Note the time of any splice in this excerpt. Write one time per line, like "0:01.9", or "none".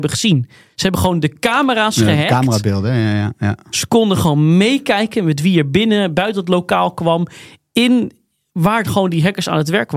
none